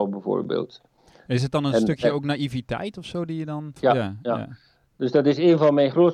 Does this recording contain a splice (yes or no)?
yes